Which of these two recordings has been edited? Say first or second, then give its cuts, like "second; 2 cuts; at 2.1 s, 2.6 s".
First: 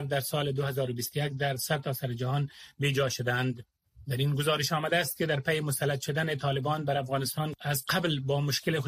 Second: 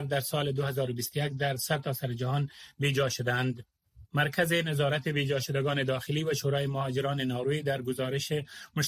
second; 1 cut; at 4.1 s